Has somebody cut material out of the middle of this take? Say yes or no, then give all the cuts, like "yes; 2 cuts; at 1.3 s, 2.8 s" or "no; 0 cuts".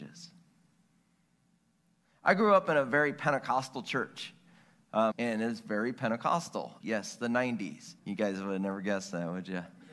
yes; 3 cuts; at 5.1 s, 6.8 s, 8.0 s